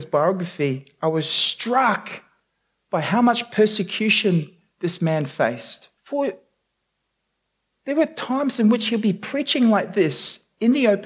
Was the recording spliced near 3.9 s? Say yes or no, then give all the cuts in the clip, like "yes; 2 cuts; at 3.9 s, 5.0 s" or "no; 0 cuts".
no; 1 cut; at 6.0 s